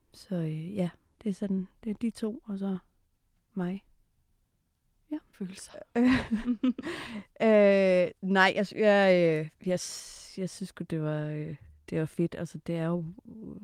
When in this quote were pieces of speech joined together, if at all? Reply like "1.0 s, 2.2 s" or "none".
5.3 s